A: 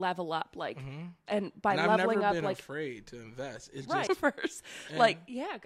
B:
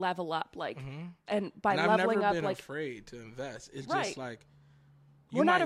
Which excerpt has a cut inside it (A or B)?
A